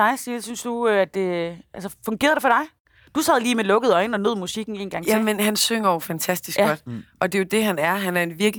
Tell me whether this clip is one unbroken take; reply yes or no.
yes